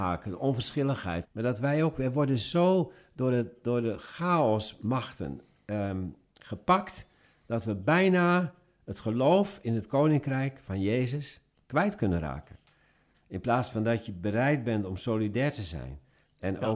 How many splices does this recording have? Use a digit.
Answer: 2